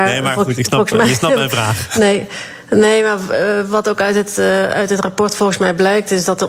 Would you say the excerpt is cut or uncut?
uncut